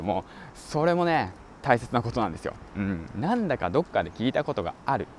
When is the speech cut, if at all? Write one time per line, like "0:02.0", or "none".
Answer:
none